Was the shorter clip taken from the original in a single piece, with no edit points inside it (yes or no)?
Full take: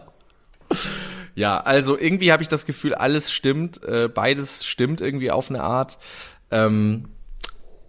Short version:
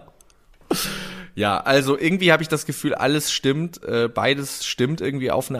yes